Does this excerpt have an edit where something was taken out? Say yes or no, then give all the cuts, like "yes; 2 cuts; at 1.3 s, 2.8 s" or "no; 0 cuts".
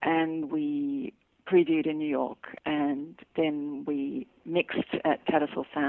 no; 0 cuts